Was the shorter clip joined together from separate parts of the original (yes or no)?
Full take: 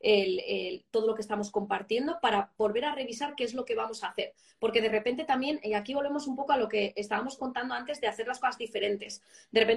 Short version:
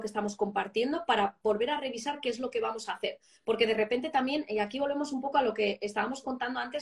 no